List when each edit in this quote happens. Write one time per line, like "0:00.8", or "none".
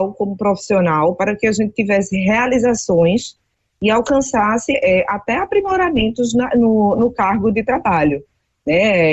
0:04.7